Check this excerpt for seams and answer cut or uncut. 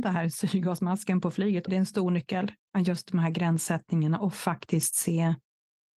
cut